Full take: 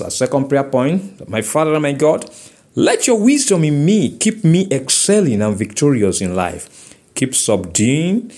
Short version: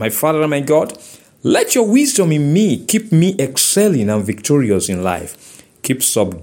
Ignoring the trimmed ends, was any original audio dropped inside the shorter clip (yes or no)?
no